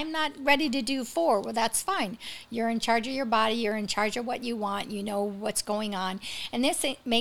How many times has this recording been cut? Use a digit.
0